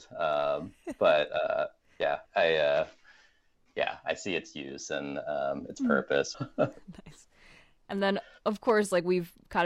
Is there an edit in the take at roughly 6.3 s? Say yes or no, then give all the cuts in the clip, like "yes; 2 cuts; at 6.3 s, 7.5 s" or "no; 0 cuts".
yes; 2 cuts; at 2.3 s, 6.3 s